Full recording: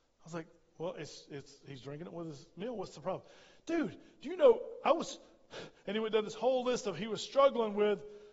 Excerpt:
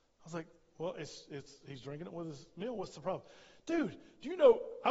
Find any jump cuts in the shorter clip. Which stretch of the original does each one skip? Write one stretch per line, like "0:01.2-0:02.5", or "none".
none